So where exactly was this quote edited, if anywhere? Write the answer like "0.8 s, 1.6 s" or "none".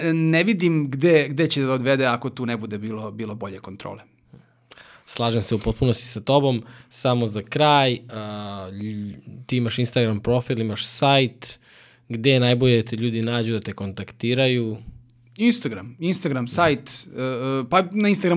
none